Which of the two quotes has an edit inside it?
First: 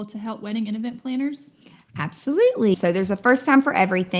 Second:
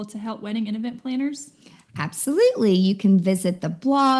first; 1 cut; at 2.7 s

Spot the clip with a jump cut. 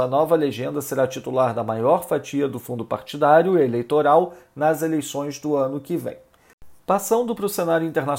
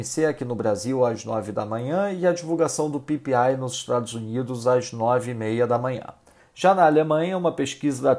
second; 1 cut; at 6.4 s

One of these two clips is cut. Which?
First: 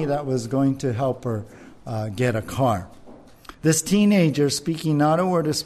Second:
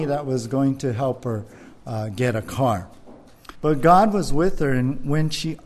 second; 1 cut; at 3.5 s

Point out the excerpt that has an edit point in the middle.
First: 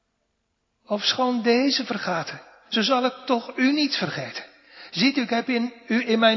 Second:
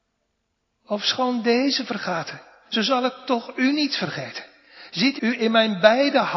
second; 1 cut; at 5.2 s

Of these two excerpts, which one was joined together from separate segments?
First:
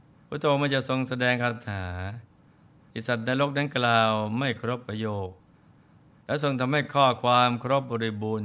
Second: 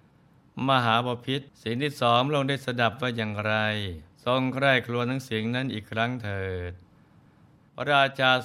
second; 2 cuts; at 1.5 s, 4.1 s

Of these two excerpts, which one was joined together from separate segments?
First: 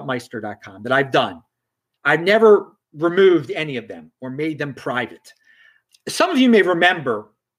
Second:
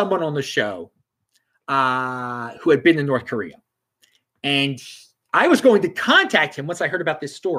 first; 2 cuts; at 2.8 s, 5.9 s

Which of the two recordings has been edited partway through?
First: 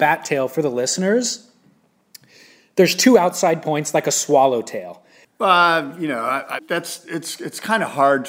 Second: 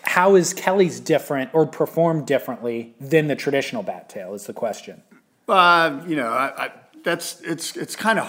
first; 2 cuts; at 5.2 s, 6.6 s

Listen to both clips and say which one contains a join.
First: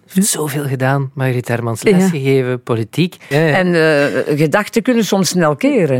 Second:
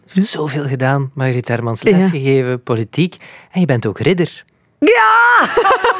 first; 1 cut; at 3.3 s

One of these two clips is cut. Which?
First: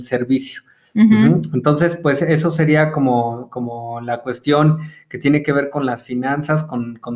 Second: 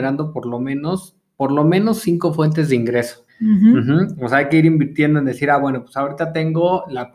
second; 1 cut; at 3.3 s

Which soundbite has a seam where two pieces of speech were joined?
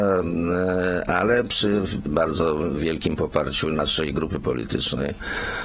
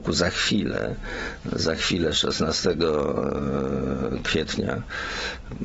first; 1 cut; at 2.1 s

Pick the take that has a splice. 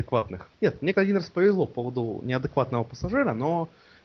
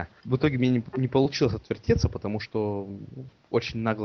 first; 1 cut; at 0.9 s

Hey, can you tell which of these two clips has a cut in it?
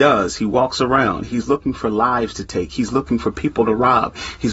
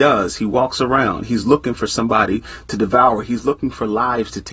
first; 1 cut; at 1.3 s

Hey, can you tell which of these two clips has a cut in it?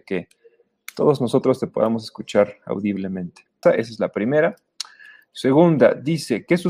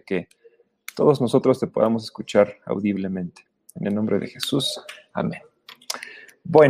first; 1 cut; at 3.6 s

